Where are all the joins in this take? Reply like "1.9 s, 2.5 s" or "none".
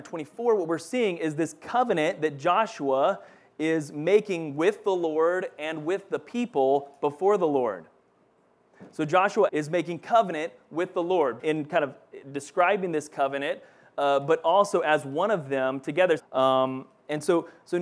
9.5 s, 11.4 s, 16.2 s

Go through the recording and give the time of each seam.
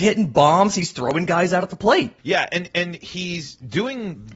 2.2 s

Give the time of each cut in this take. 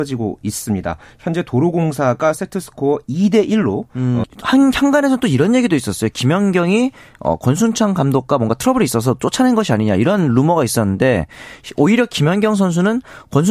4.2 s

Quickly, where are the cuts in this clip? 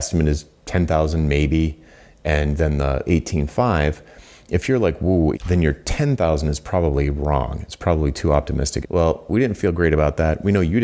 3.0 s, 5.3 s, 8.8 s

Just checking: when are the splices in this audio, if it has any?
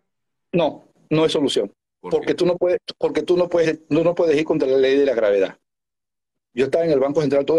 3.6 s, 6.4 s

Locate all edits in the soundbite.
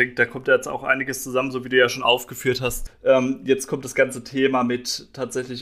2.9 s

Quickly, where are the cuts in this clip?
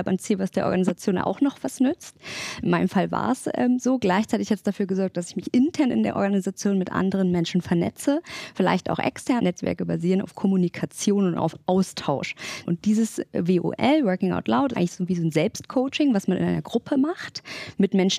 9.4 s, 12.6 s, 14.7 s

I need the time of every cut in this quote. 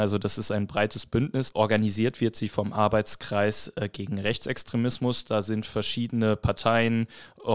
1.5 s

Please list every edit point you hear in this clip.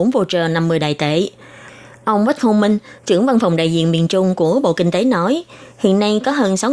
none

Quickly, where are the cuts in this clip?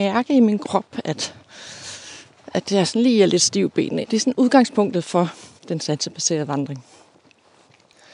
4.0 s, 5.6 s

